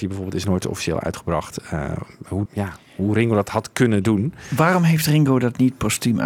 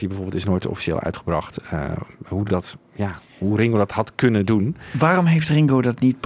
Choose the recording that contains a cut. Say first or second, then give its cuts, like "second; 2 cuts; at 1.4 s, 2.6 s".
first; 1 cut; at 2.5 s